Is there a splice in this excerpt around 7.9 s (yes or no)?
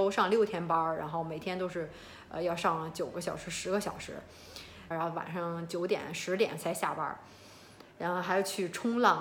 yes